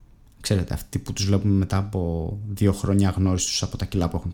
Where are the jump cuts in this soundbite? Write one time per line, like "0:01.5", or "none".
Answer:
none